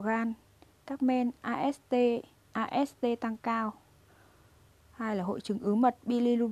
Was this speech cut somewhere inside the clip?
no; 0 cuts

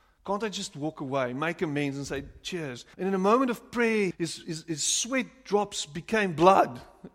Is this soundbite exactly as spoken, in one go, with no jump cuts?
no; 2 cuts; at 2.9 s, 4.1 s

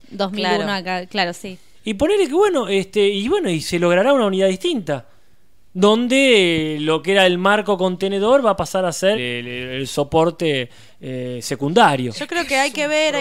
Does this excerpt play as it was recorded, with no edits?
no; 2 cuts; at 1.7 s, 9.1 s

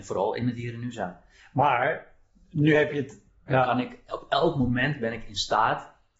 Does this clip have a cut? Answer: yes; 1 cut; at 3.5 s

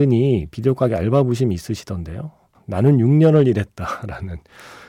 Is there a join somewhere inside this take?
yes; 1 cut; at 2.5 s

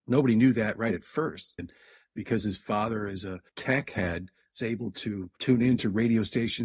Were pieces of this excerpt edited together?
yes; 2 cuts; at 1.6 s, 3.5 s

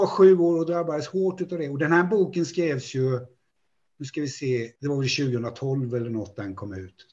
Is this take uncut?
no; 1 cut; at 4.8 s

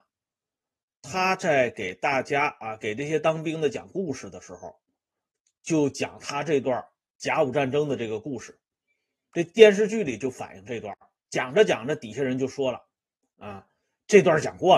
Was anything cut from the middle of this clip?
no; 0 cuts

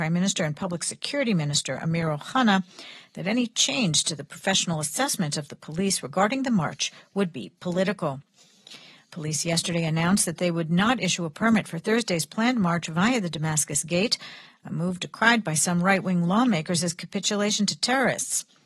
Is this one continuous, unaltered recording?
yes; 0 cuts

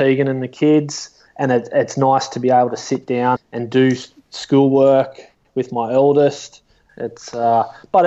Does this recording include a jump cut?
yes; 3 cuts; at 1.3 s, 3.4 s, 6.9 s

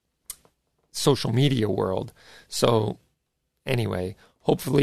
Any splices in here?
no; 0 cuts

